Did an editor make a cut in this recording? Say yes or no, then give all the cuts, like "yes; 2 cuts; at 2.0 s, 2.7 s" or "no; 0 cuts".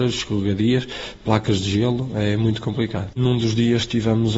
yes; 1 cut; at 3.1 s